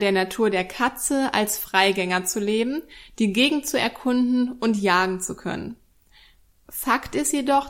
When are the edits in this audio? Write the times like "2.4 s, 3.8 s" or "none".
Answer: none

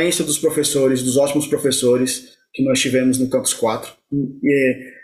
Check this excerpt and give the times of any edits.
none

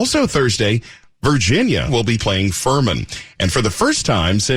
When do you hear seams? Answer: 1.9 s

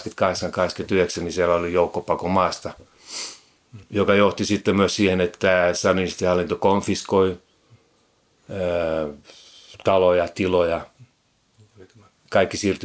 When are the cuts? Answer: none

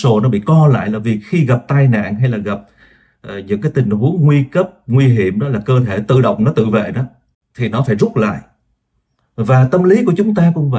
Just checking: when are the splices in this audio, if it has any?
none

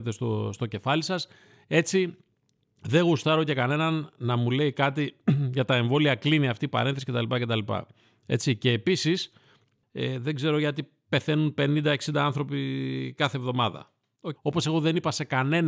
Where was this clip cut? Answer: 9.8 s, 14.4 s

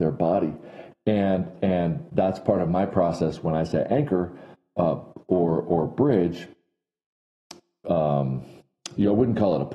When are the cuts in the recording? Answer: 0.9 s, 7.8 s

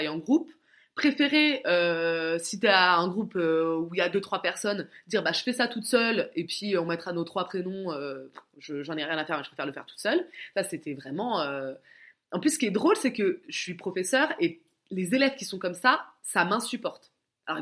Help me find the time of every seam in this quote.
none

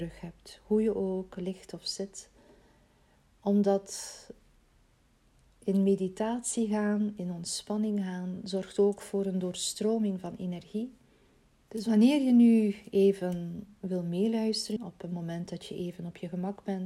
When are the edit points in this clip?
11.5 s, 14.8 s

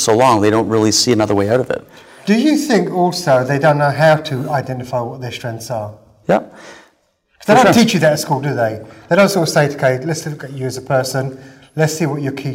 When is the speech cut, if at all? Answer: 6.2 s

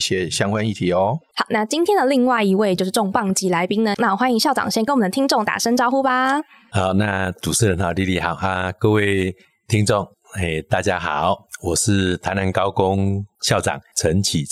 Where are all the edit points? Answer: 3.9 s

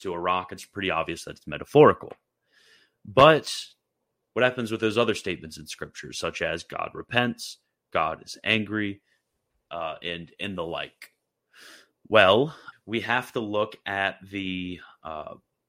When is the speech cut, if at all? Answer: 12.7 s

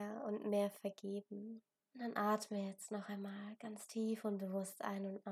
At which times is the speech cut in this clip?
1.8 s

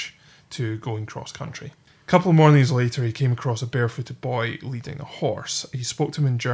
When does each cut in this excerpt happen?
none

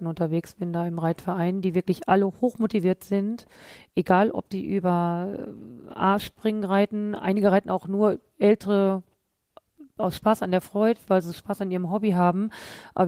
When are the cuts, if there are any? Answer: none

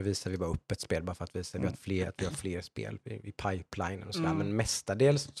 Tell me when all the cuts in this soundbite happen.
none

